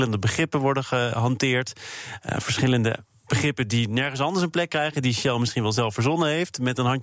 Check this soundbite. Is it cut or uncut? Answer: uncut